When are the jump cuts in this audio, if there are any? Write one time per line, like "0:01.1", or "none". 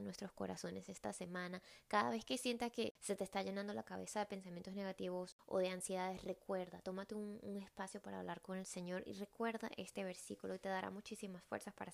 none